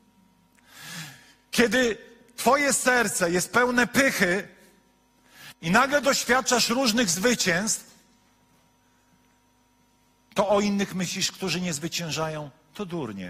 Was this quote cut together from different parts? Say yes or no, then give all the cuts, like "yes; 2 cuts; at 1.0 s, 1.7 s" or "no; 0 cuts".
no; 0 cuts